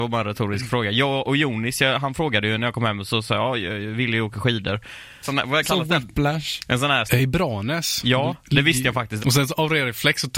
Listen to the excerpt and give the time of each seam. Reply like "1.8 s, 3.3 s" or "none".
5.2 s, 7.1 s, 9.2 s

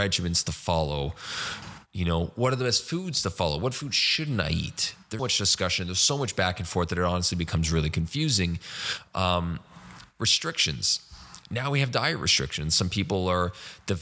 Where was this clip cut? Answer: 5.2 s

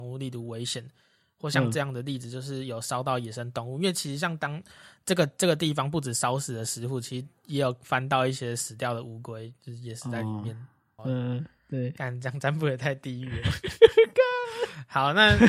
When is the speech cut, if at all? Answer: 11.0 s

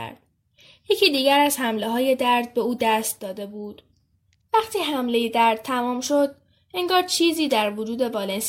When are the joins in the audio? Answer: none

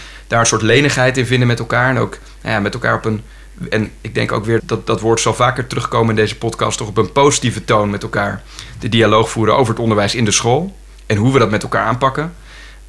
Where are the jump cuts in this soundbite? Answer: 4.6 s

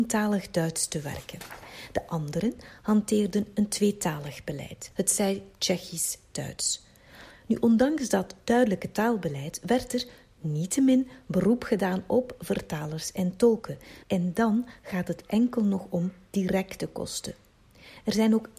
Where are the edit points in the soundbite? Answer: 4.9 s, 14.0 s

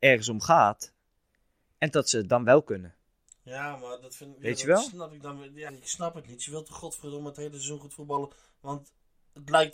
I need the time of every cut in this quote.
5.7 s

